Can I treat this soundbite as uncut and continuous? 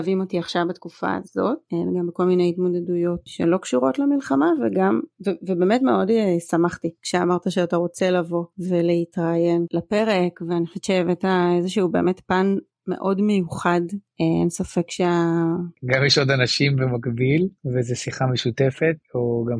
no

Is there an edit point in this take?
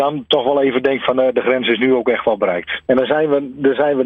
yes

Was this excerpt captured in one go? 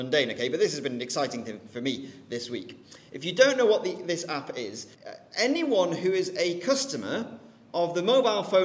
no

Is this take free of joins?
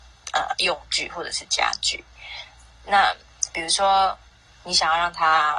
yes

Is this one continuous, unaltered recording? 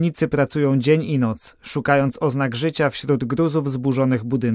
yes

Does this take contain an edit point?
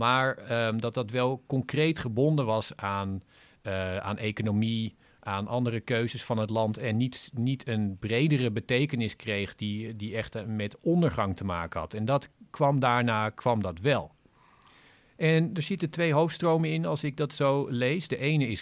no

